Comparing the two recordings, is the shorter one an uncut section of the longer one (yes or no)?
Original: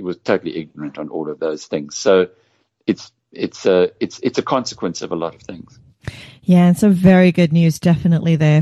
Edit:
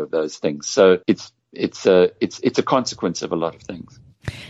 no